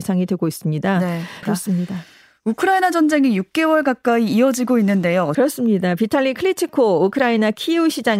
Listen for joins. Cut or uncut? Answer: cut